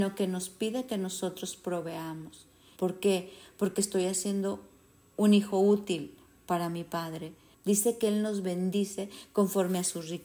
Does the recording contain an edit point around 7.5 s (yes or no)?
yes